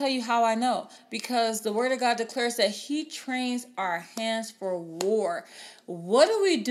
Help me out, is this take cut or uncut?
uncut